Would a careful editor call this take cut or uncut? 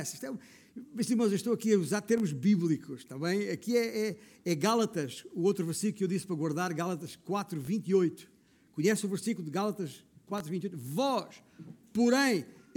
uncut